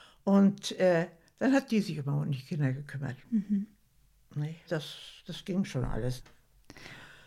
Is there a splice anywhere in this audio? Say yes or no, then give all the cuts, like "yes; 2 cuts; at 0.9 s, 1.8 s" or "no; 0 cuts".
yes; 2 cuts; at 4.6 s, 6.2 s